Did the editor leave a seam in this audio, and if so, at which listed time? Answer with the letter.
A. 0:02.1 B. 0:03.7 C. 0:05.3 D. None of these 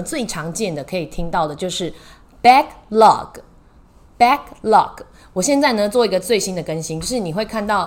D